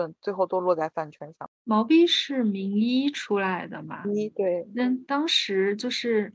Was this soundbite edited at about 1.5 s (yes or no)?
yes